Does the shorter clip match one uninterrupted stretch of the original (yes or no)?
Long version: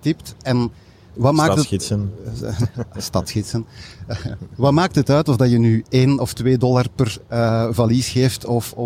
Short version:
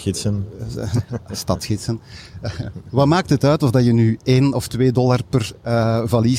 yes